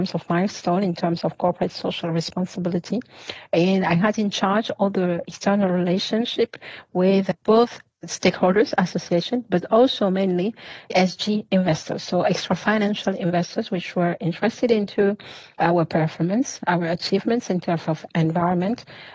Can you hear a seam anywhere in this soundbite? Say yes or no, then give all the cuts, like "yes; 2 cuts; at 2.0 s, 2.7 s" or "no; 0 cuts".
no; 0 cuts